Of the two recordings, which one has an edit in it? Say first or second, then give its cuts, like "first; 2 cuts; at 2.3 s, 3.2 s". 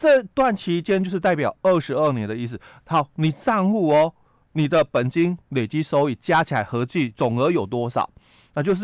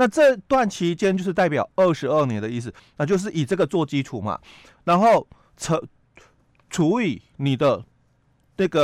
second; 1 cut; at 2.8 s